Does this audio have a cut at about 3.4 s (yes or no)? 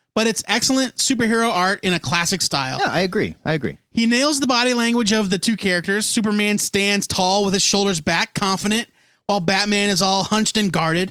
no